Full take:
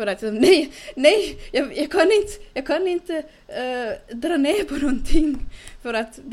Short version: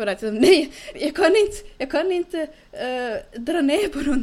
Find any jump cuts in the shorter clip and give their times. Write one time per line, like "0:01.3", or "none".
0:00.9

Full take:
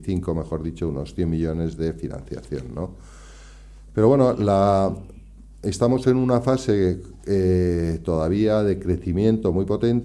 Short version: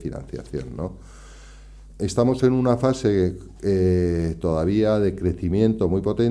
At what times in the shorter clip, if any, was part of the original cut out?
0:01.9

